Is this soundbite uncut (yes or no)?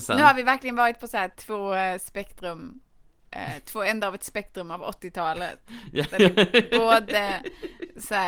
no